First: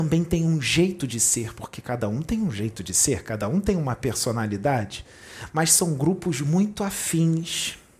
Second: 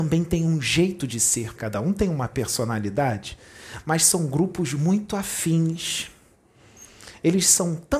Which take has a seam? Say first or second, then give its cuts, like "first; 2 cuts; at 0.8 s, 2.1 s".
second; 1 cut; at 1.6 s